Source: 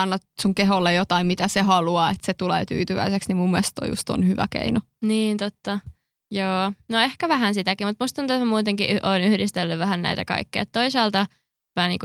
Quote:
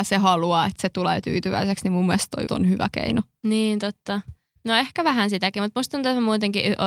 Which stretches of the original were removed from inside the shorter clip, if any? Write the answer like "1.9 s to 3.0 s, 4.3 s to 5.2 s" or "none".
3.9 s to 4.0 s, 6.1 s to 6.8 s